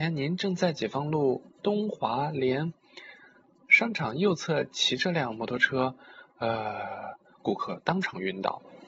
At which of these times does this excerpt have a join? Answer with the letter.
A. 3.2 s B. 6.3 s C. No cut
C